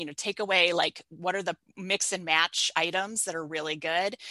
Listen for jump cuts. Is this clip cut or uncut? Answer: uncut